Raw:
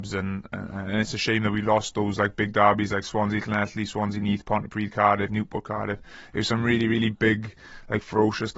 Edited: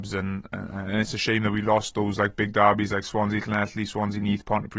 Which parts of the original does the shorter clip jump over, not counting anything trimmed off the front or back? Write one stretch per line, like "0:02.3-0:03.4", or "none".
none